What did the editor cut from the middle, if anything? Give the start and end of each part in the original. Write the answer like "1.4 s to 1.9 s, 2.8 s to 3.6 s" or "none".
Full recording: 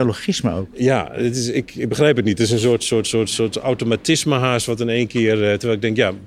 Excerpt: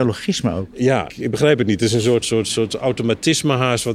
1.1 s to 1.7 s, 2.8 s to 3.0 s